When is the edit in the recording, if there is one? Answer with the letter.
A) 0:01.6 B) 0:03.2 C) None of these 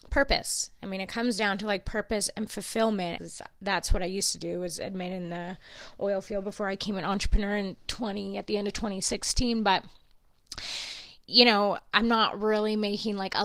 B